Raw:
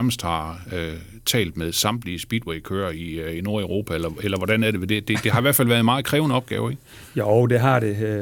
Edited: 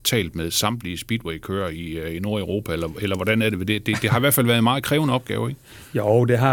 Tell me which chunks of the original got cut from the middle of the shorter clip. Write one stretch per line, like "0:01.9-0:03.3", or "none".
none